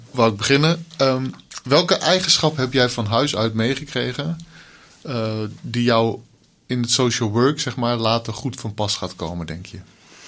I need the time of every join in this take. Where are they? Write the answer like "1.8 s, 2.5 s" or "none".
none